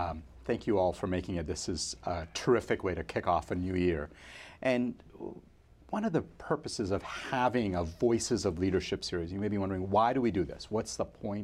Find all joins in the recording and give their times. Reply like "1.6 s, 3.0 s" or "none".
none